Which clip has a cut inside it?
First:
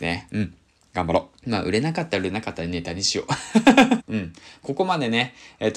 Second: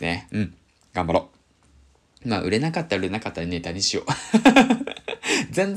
first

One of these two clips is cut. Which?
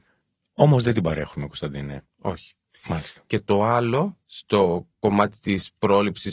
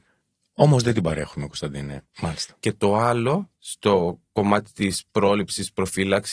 second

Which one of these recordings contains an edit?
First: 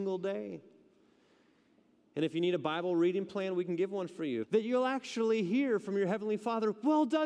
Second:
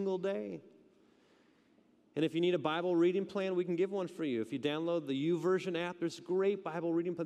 first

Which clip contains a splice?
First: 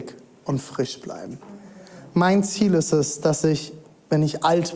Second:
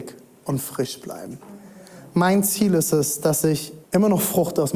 second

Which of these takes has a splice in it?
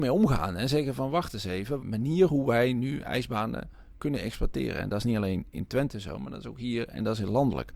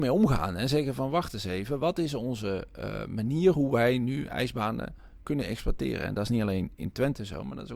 first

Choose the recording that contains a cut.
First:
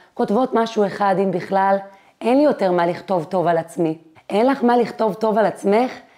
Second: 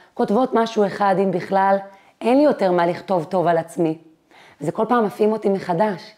first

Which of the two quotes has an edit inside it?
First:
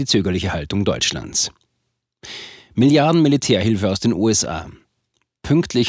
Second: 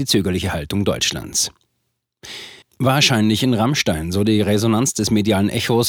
second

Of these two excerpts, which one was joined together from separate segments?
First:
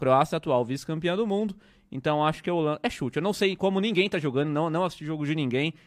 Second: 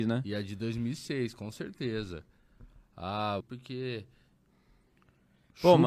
second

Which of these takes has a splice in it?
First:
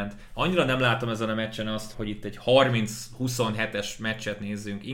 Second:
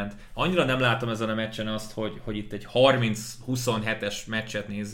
first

